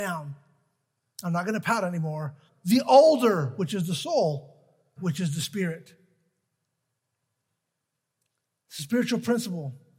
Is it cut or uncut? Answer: cut